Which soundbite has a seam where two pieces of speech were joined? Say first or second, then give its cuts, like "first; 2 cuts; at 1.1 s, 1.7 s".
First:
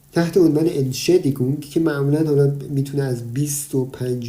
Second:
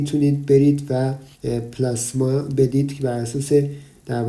second; 1 cut; at 1.3 s